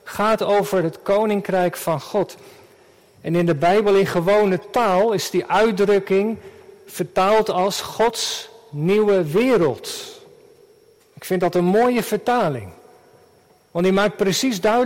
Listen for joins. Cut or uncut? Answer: uncut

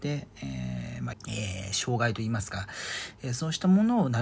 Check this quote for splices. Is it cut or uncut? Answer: cut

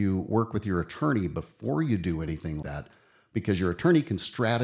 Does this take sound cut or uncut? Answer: cut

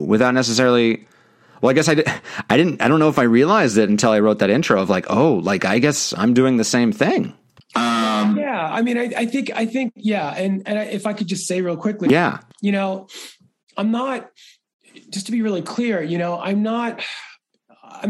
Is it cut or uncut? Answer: uncut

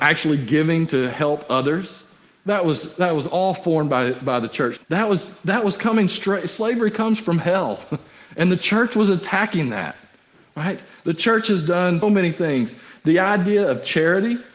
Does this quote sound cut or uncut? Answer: cut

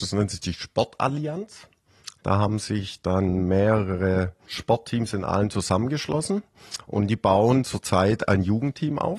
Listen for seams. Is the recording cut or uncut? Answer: uncut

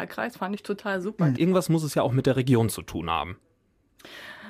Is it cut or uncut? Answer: cut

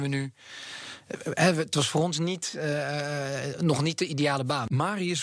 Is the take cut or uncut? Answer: uncut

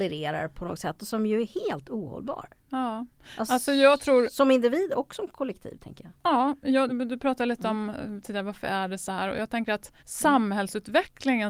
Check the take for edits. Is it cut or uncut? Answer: cut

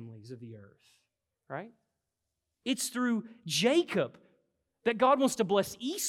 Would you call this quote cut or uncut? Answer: uncut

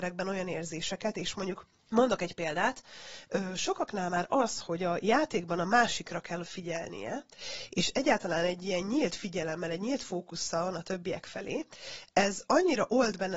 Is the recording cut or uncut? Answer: uncut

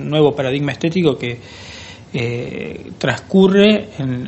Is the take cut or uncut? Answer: uncut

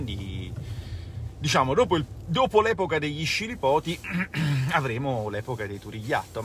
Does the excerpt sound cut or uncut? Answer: uncut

